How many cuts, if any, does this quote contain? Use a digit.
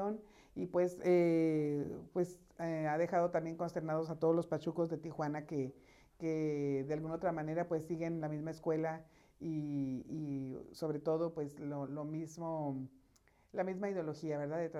0